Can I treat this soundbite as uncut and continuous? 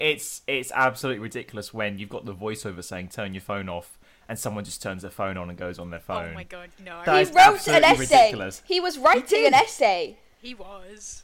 yes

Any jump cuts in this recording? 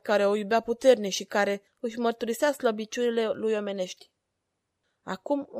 yes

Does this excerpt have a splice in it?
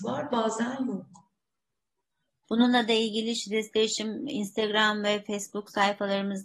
yes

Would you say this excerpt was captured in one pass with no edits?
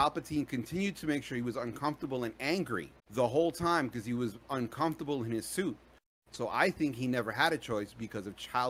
no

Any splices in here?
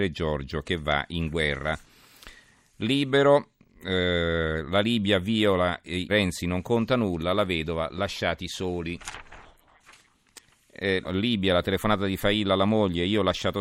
yes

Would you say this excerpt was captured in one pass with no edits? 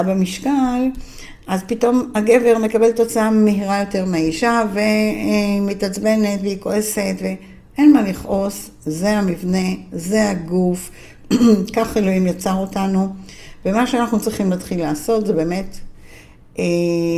yes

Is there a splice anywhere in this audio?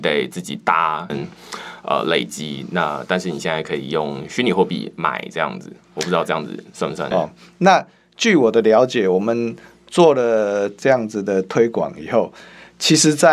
yes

